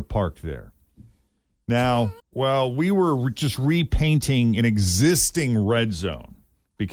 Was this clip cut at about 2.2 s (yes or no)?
yes